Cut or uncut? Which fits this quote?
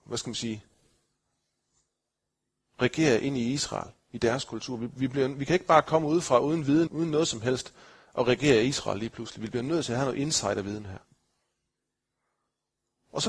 cut